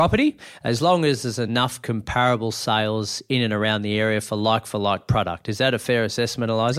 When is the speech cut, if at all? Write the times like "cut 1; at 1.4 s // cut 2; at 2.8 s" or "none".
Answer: none